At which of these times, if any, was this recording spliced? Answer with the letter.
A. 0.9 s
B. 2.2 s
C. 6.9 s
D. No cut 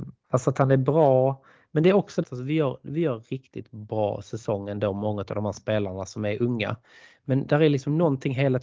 B